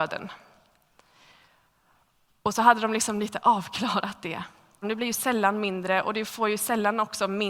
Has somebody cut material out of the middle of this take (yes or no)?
yes